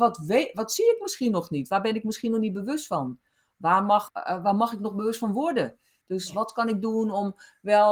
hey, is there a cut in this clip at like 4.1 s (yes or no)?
yes